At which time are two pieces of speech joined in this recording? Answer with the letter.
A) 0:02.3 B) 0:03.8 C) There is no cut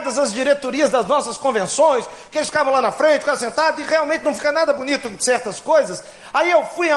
C